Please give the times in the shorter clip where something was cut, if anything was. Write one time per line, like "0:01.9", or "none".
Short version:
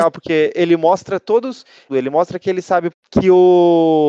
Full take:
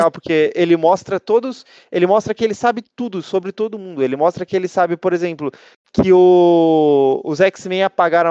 0:01.9
0:02.9